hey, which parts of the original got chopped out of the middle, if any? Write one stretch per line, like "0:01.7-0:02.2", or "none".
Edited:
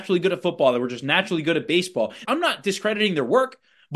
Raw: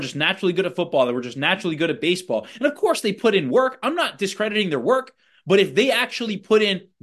0:02.6-0:03.8